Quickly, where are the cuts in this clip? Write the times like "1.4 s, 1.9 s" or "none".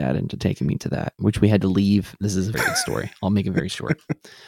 2.5 s